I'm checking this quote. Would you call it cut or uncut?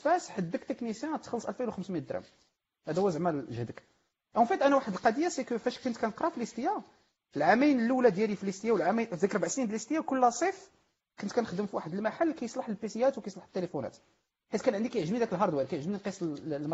uncut